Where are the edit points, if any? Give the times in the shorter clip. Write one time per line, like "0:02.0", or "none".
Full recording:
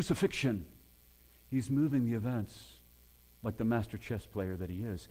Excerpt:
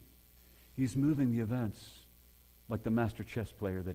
none